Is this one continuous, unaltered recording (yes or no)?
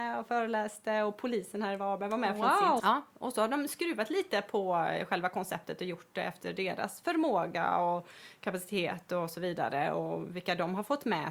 no